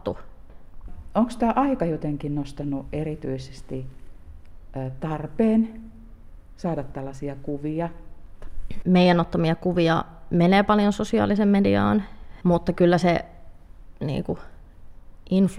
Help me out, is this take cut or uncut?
cut